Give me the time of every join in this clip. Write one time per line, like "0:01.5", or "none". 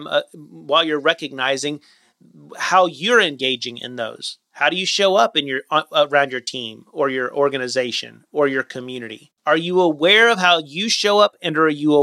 0:04.4
0:09.4